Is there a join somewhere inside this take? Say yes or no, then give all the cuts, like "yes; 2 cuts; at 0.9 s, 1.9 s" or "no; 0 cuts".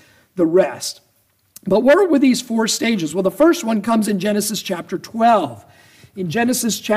no; 0 cuts